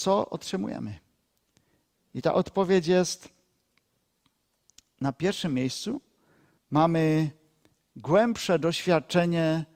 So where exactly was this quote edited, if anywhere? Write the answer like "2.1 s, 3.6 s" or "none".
6.6 s

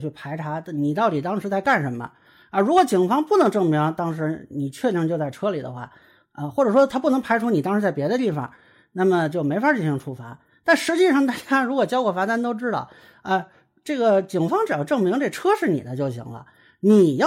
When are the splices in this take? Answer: none

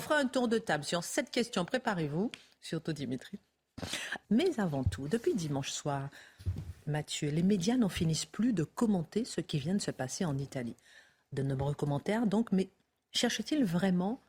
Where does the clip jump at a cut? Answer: 4.2 s

